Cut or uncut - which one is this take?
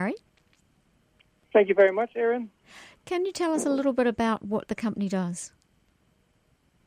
uncut